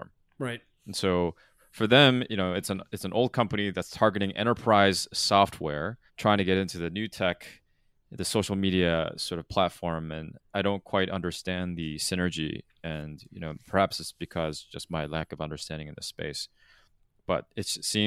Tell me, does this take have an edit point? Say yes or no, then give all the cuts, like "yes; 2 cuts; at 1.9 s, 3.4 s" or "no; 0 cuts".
yes; 1 cut; at 6.1 s